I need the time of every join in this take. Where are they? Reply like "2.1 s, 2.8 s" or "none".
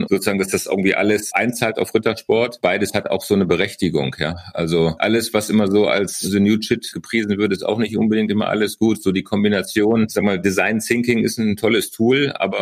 none